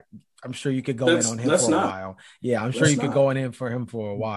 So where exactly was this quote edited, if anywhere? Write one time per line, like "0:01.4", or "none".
none